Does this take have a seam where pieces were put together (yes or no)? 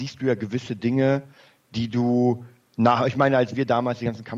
no